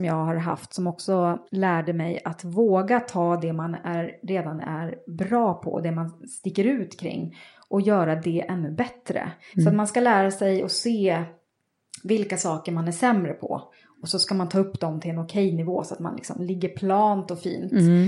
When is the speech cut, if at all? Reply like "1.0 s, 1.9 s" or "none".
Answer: 1.5 s, 9.5 s